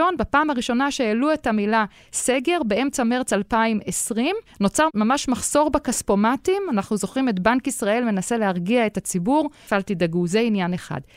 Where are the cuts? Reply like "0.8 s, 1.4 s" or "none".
9.7 s

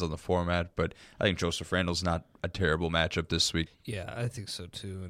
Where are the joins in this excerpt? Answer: 3.7 s

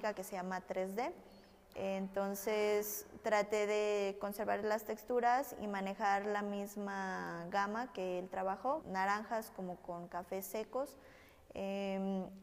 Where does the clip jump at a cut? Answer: 1.7 s, 8.8 s

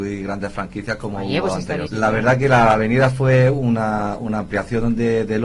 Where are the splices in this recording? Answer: 1.9 s

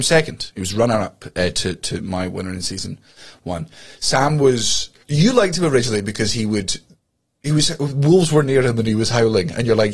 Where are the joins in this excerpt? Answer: 1.8 s, 5.0 s

